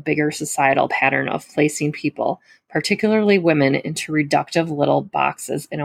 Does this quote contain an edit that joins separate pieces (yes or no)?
no